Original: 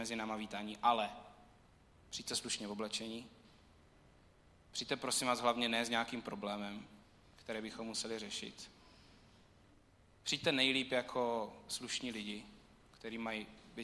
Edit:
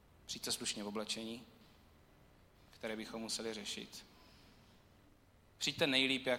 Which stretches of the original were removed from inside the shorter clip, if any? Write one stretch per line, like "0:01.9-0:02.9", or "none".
0:04.4-0:07.2